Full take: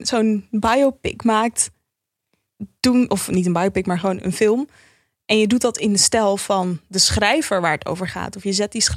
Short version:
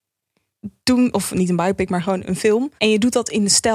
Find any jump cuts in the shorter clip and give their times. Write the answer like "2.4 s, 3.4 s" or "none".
2.8 s